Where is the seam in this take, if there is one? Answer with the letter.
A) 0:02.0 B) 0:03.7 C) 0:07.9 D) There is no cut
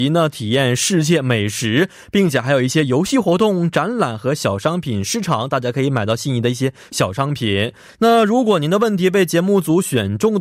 C